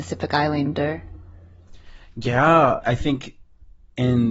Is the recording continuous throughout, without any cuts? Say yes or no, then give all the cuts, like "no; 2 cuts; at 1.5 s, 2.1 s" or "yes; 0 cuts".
yes; 0 cuts